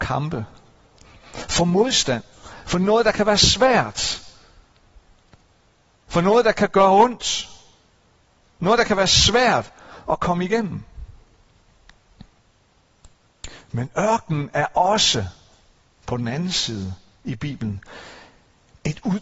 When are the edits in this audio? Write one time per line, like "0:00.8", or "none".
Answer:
none